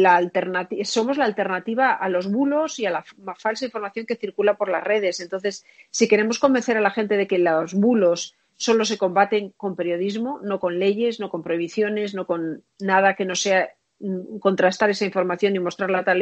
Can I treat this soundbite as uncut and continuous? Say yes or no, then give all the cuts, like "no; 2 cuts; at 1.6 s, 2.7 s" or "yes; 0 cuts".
yes; 0 cuts